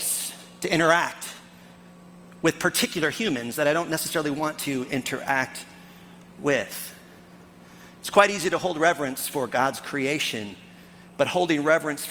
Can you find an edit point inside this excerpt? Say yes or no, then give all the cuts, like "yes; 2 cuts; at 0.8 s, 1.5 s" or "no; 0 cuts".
no; 0 cuts